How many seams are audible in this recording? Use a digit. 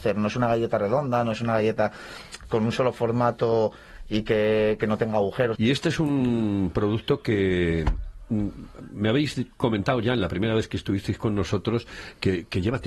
1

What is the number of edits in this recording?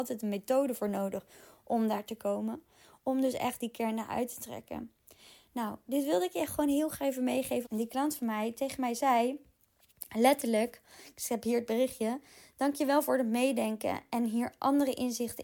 1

